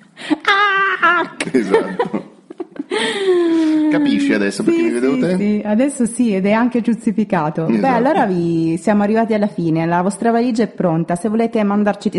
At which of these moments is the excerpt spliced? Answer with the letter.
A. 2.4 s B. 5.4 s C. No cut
C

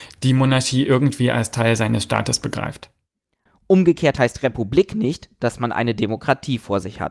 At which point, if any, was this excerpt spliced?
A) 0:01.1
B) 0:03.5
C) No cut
B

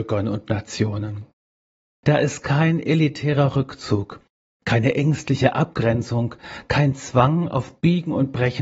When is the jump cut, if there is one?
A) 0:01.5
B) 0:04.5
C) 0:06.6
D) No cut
B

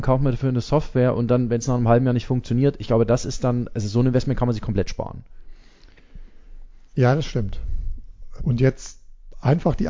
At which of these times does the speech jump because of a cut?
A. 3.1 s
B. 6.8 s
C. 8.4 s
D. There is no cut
C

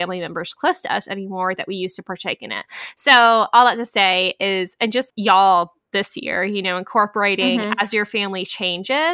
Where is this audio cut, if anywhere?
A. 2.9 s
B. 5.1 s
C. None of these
B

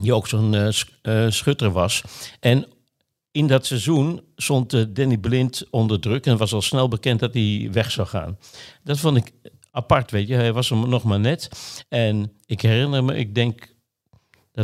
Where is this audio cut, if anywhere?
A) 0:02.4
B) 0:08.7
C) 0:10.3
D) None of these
B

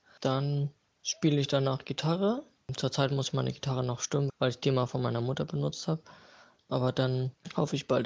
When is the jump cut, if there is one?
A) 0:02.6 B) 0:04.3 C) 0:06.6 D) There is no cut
B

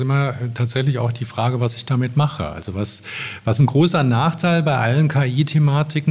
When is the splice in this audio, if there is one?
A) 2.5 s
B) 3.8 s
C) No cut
C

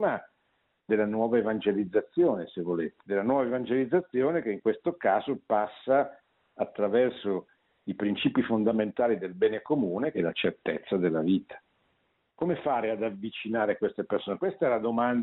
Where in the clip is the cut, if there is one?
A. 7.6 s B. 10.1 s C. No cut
B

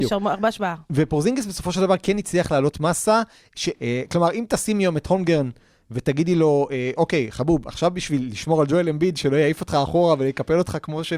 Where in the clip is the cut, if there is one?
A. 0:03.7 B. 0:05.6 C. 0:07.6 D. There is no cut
A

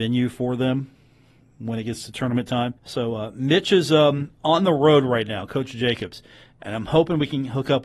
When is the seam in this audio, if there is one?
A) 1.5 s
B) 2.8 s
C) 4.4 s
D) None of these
B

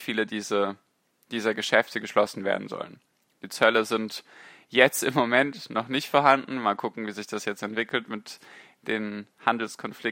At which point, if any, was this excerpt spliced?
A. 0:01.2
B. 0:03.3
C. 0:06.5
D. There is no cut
B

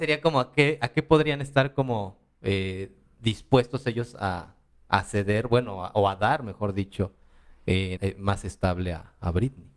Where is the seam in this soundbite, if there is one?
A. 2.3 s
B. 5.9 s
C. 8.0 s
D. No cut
C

